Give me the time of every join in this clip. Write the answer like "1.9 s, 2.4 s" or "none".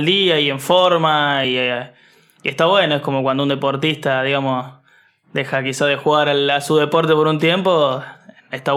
none